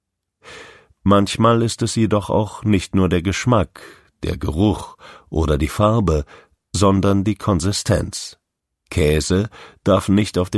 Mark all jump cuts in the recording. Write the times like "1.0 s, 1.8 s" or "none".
8.9 s